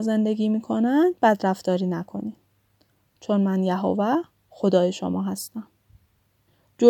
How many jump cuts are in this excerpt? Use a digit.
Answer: 1